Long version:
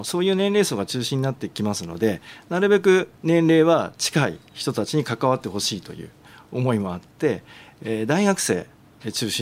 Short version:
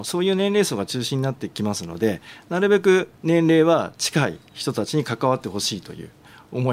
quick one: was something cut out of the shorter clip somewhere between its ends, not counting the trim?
no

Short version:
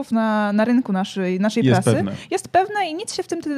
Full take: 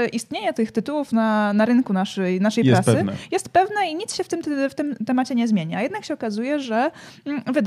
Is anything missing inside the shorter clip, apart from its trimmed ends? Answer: no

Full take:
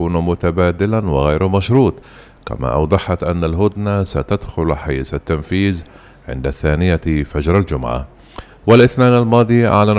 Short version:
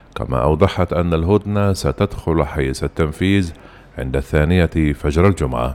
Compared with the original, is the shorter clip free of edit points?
yes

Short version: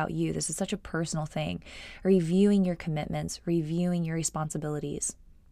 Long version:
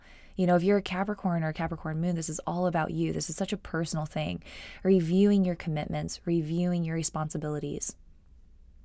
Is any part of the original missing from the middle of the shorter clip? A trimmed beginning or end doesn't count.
no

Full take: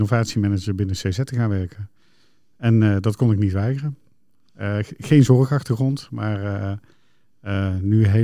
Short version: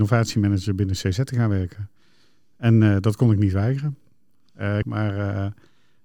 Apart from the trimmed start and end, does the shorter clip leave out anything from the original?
yes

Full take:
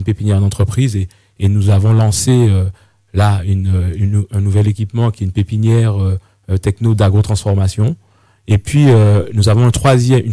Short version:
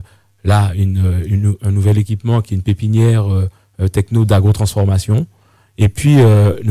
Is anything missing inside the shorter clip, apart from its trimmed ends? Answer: no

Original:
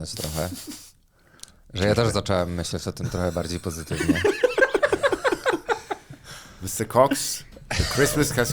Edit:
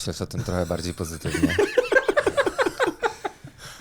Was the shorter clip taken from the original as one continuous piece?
yes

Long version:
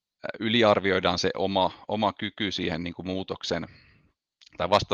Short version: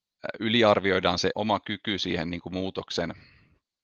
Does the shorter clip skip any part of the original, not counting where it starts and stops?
yes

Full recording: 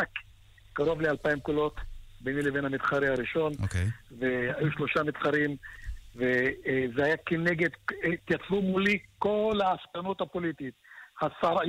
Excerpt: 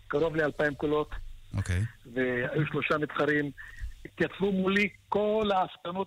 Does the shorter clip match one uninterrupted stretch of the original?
no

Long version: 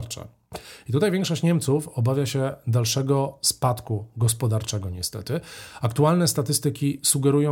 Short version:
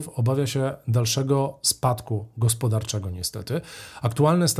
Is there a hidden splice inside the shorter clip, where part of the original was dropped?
no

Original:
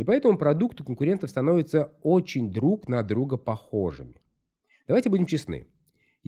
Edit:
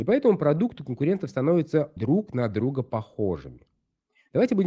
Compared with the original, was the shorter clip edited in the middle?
yes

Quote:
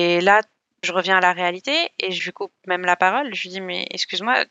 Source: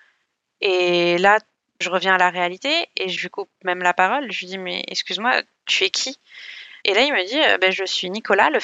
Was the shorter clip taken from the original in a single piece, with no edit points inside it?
yes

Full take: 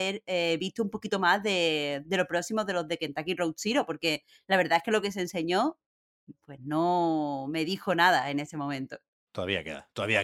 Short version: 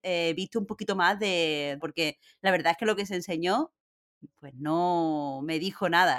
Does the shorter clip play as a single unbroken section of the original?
no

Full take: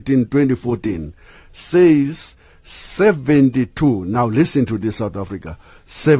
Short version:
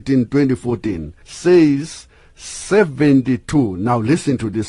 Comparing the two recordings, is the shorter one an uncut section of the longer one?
no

